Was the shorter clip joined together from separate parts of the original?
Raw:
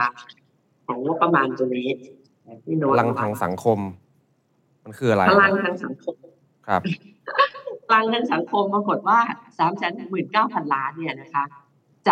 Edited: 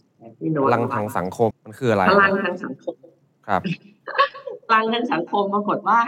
yes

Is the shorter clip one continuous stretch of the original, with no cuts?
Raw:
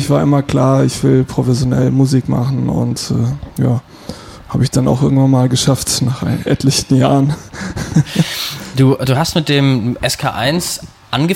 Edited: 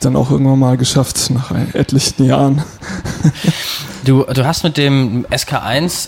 yes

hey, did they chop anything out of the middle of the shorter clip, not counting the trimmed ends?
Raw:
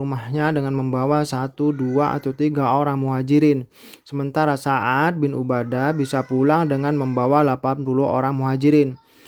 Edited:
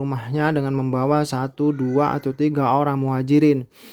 no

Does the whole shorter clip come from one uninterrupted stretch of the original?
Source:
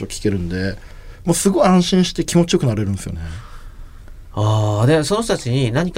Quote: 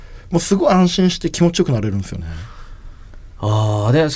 yes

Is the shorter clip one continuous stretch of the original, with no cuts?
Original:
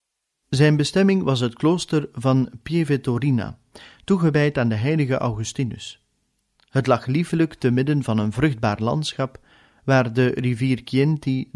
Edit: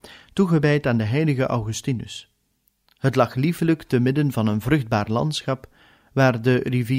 yes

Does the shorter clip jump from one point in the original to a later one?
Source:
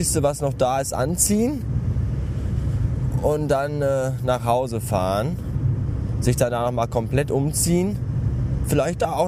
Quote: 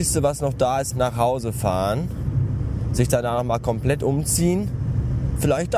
yes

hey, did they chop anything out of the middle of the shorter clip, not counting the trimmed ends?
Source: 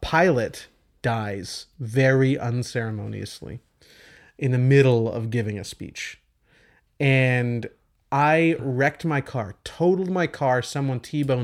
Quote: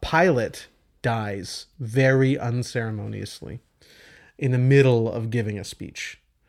no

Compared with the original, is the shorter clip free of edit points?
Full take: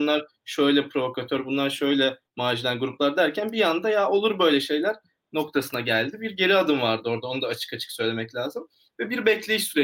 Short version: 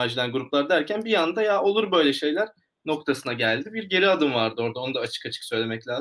yes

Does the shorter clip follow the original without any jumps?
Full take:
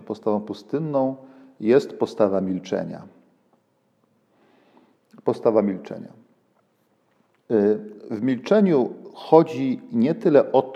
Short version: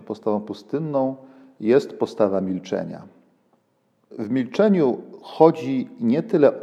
no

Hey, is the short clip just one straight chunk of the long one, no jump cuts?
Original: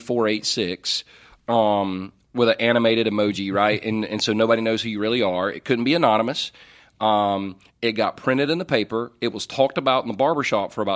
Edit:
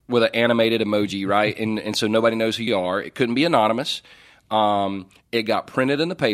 no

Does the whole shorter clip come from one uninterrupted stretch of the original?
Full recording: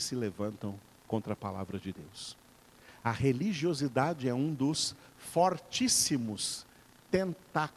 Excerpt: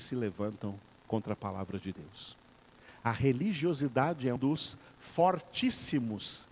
no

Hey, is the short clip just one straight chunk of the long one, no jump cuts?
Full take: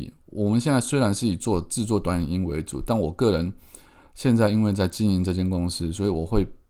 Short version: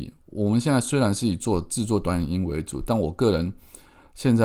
yes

